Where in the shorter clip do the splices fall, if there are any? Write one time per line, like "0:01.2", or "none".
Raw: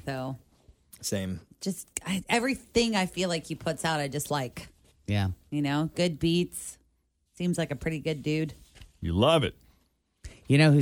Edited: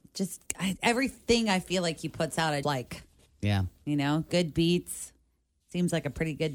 0:02.6